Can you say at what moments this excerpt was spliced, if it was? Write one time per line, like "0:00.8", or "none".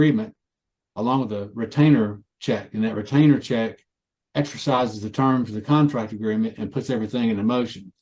none